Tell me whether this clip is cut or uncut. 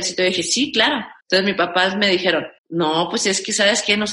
cut